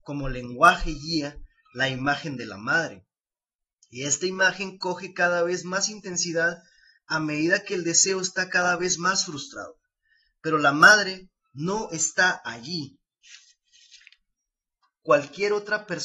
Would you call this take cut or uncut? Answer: uncut